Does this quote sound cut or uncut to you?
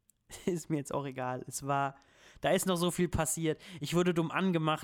uncut